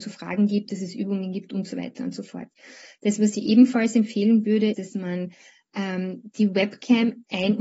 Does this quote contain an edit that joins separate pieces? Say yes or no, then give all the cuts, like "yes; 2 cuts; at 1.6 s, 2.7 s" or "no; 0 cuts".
yes; 1 cut; at 4.7 s